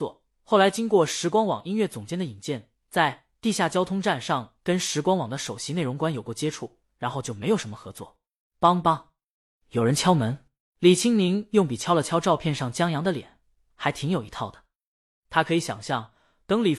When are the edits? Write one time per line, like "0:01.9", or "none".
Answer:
0:08.5
0:10.6